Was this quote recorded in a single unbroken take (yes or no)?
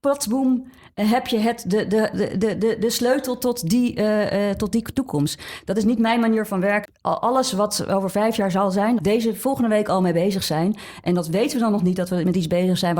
no